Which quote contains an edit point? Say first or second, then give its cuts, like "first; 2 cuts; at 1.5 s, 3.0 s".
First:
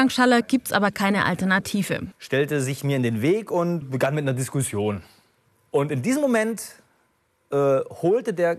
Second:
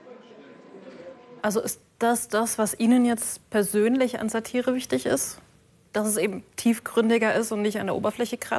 first; 2 cuts; at 2.1 s, 3.8 s